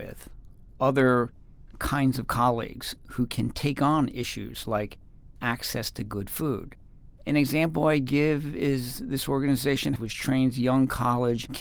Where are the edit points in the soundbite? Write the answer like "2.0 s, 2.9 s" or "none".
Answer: 10.0 s